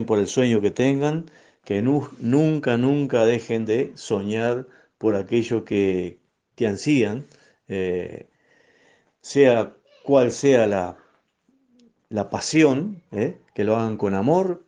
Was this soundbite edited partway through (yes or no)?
no